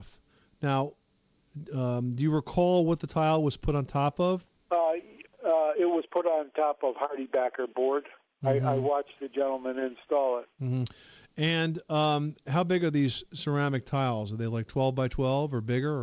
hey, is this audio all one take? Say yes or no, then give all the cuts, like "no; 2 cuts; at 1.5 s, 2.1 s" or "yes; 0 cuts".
yes; 0 cuts